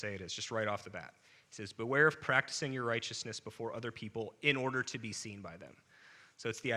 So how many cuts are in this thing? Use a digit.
0